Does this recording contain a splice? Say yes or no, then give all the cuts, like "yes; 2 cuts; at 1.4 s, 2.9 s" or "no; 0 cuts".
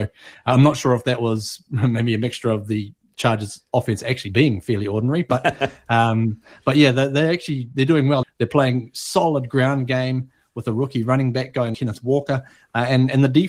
yes; 2 cuts; at 8.2 s, 11.7 s